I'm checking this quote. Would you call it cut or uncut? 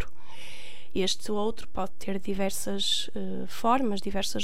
uncut